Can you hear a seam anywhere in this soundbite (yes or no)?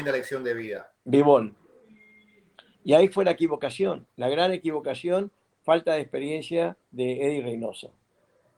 yes